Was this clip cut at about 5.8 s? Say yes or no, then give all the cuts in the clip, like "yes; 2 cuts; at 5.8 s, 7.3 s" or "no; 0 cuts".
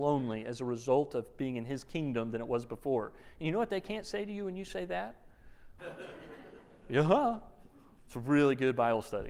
yes; 1 cut; at 5.8 s